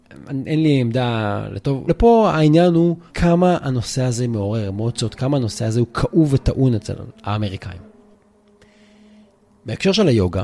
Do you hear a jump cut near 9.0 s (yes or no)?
no